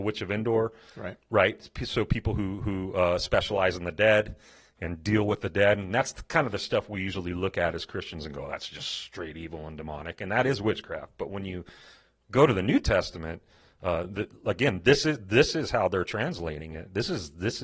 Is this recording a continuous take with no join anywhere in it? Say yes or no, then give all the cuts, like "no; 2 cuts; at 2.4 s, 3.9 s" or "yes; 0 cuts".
yes; 0 cuts